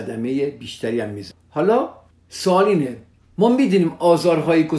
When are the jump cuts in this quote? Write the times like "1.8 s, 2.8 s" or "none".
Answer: none